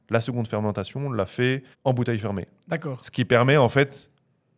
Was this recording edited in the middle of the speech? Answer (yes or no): yes